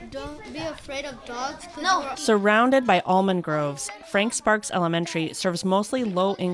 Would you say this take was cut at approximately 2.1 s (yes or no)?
yes